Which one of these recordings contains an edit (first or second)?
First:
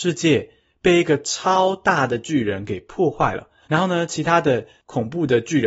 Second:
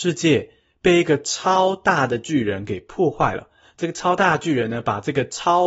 first